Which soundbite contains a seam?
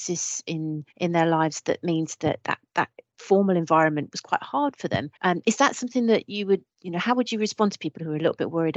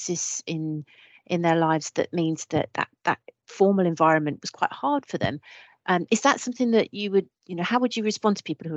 first; 2 cuts; at 0.9 s, 5.2 s

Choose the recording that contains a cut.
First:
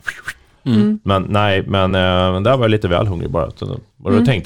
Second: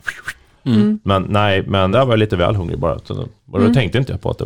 second; 1 cut; at 1.9 s

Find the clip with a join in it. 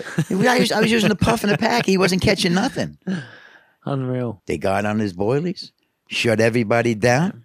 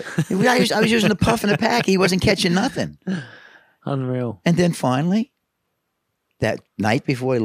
first; 1 cut; at 4.4 s

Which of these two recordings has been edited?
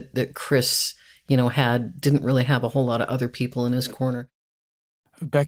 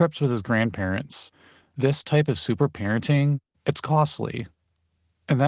second; 1 cut; at 3.5 s

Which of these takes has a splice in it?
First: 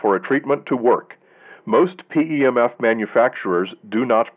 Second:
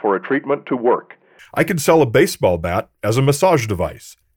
second; 1 cut; at 1.4 s

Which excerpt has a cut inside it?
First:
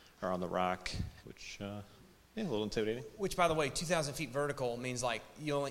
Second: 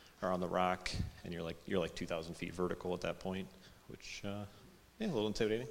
first; 1 cut; at 1.2 s

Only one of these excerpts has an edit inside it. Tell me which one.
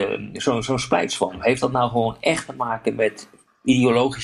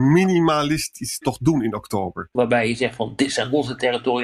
second; 1 cut; at 2.4 s

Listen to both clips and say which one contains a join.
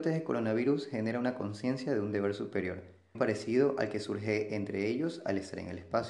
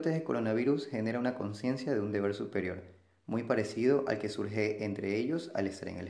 first; 1 cut; at 3.1 s

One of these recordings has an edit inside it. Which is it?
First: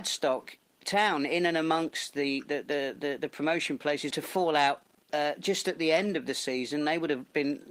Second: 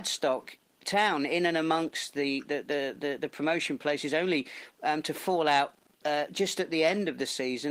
first; 1 cut; at 4.1 s

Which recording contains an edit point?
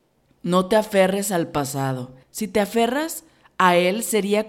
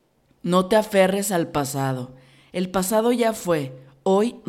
first; 1 cut; at 2.2 s

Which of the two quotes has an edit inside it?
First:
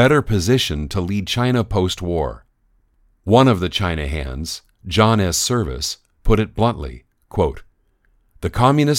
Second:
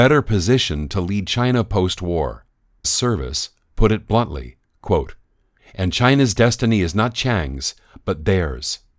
second; 2 cuts; at 2.8 s, 5.6 s

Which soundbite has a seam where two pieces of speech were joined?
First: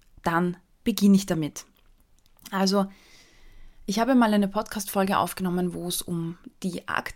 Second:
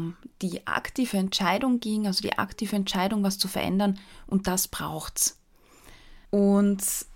second; 1 cut; at 6.3 s

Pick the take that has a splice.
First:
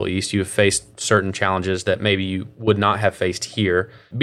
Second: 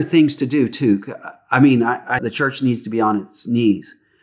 second; 1 cut; at 2.2 s

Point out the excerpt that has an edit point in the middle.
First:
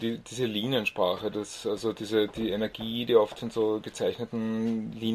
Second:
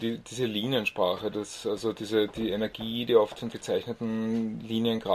second; 1 cut; at 3.5 s

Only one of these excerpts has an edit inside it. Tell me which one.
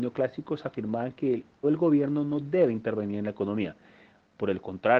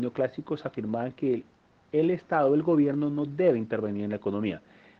first; 1 cut; at 1.6 s

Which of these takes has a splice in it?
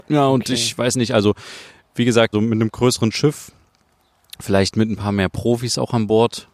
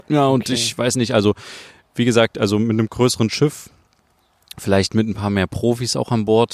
first; 1 cut; at 2.3 s

